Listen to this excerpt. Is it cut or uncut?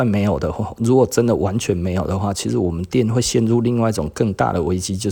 uncut